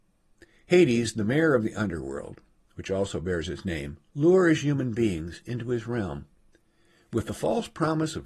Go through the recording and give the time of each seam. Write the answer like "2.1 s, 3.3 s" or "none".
4.1 s